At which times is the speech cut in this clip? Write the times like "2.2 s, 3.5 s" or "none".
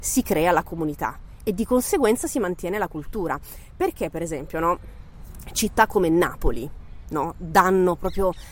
none